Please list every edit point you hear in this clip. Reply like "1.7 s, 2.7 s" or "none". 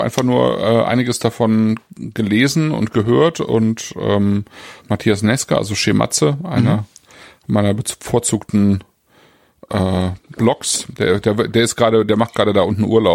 4.8 s